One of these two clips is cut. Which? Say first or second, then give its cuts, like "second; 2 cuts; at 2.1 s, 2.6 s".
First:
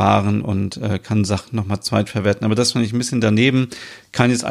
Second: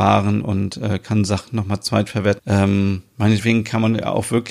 second; 1 cut; at 2.4 s